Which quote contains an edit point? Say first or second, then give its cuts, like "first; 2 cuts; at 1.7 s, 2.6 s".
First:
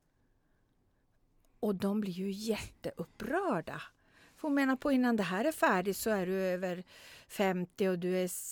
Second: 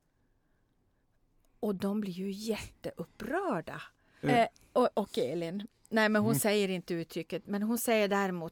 second; 1 cut; at 4.2 s